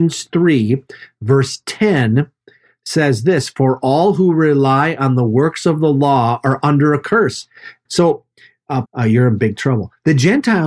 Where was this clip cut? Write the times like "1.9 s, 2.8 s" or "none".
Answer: 7.9 s, 8.9 s